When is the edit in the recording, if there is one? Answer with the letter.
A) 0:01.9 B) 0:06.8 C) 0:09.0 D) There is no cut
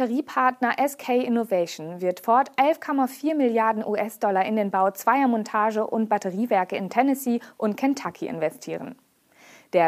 D